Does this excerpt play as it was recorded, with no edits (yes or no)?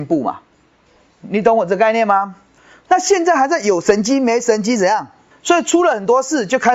no